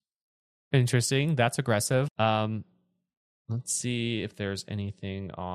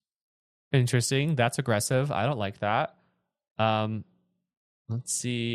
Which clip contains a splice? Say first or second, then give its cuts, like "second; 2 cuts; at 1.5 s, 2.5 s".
first; 1 cut; at 2.1 s